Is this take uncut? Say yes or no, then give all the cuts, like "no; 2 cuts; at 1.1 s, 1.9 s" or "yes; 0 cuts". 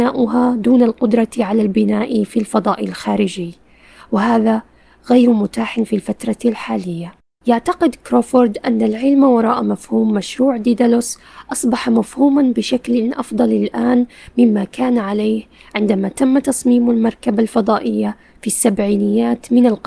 yes; 0 cuts